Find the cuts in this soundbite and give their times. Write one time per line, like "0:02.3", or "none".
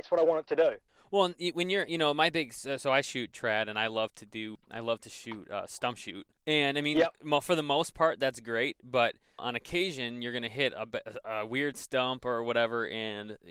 none